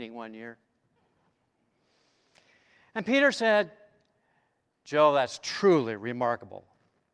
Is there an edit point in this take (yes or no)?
no